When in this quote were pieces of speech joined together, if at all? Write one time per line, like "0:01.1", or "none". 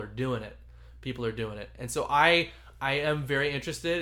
none